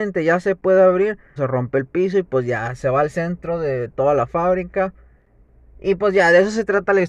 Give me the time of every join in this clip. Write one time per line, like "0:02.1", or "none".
0:01.4

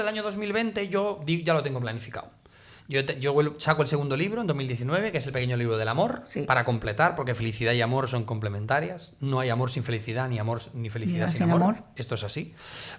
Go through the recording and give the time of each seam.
none

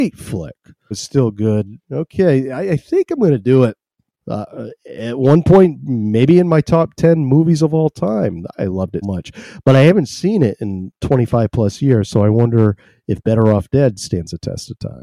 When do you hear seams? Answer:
0:00.9
0:04.1
0:09.0

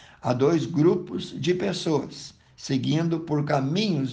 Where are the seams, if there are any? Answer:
none

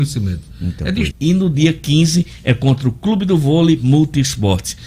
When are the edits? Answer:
0:01.1

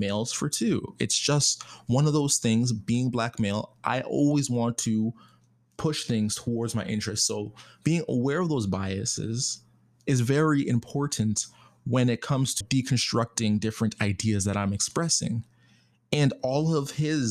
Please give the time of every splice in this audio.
0:12.6

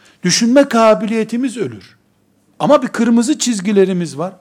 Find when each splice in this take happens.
0:02.5

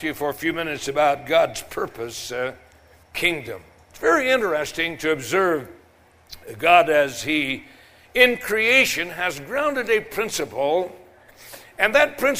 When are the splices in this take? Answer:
0:03.0

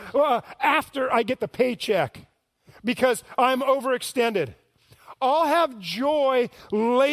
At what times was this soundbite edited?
none

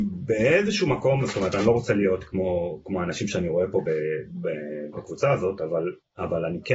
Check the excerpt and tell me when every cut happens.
0:04.9

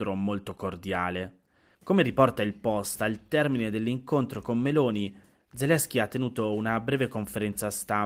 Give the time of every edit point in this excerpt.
0:01.8

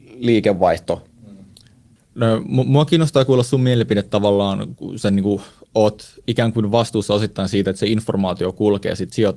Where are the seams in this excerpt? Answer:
0:02.0

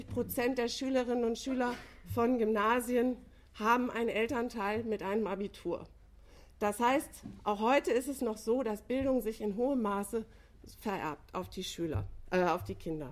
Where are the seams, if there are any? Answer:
none

